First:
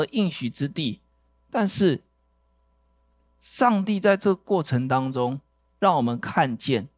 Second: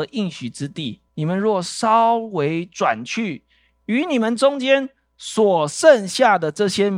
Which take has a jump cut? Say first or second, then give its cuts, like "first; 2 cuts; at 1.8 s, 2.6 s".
second; 1 cut; at 1.1 s